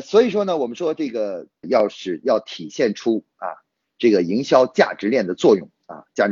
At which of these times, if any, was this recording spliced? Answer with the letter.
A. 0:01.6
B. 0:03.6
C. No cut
A